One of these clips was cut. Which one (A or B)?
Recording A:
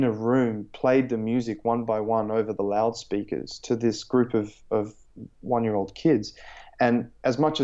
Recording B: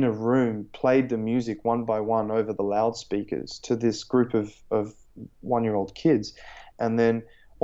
B